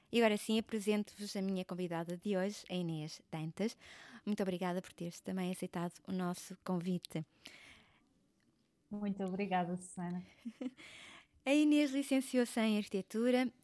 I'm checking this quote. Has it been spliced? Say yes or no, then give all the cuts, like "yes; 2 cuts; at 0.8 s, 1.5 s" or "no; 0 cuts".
yes; 1 cut; at 4.2 s